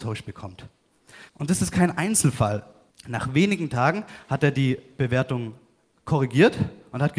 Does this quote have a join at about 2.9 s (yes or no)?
yes